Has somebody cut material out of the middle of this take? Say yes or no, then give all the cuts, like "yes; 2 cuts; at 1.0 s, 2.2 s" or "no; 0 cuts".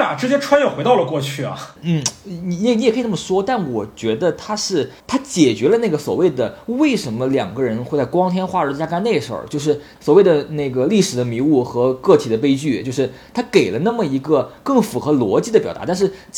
no; 0 cuts